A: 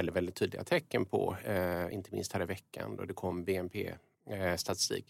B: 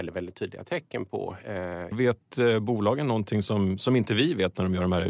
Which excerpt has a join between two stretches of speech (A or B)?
B